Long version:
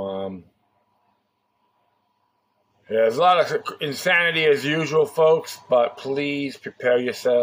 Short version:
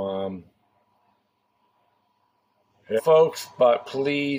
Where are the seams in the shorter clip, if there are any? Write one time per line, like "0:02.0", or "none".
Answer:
0:03.0